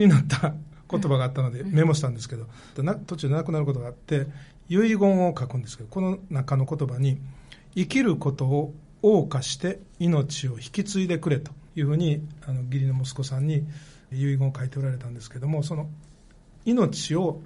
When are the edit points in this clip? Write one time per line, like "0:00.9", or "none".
0:02.8
0:11.7
0:14.1